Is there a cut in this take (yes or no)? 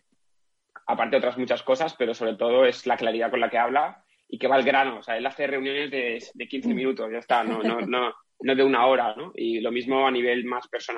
no